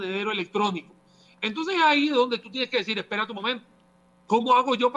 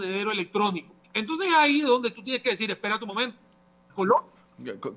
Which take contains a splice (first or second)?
second